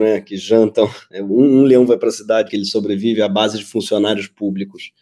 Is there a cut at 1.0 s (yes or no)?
no